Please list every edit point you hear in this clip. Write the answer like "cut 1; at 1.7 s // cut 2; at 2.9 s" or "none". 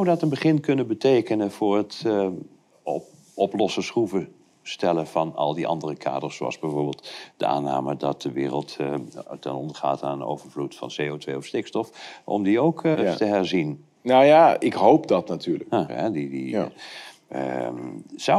cut 1; at 12.9 s // cut 2; at 15.9 s